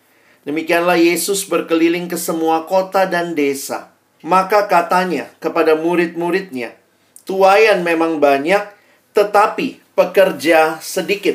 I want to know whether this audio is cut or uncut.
cut